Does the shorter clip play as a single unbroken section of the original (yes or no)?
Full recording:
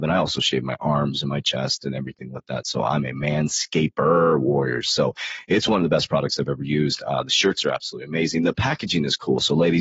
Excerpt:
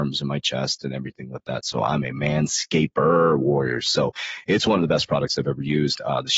yes